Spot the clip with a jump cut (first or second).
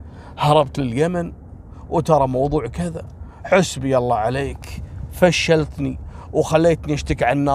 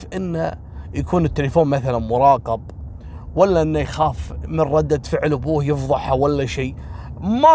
first